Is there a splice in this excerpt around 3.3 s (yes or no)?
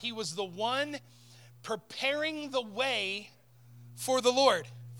no